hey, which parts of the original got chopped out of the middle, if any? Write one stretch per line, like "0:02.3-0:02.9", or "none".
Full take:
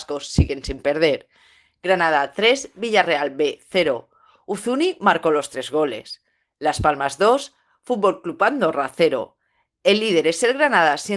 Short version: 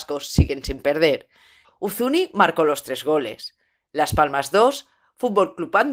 0:01.6-0:04.3